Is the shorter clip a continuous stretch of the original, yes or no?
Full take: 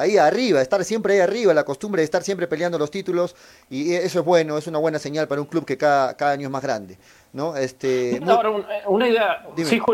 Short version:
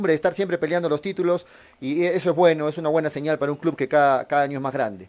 yes